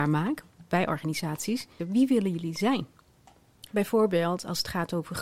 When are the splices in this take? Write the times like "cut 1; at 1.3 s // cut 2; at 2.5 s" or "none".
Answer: cut 1; at 1.8 s // cut 2; at 3.6 s